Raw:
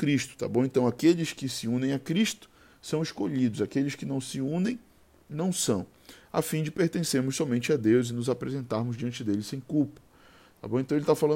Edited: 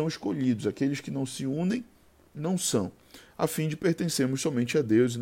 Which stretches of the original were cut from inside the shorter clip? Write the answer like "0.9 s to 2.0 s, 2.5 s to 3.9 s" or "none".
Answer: none